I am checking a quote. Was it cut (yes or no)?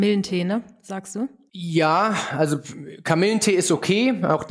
no